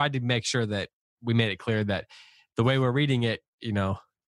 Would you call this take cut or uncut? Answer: uncut